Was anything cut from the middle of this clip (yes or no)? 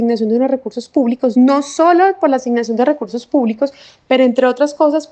no